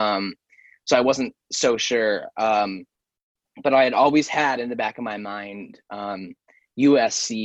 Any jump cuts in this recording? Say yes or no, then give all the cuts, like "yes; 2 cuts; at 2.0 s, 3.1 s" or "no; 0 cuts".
no; 0 cuts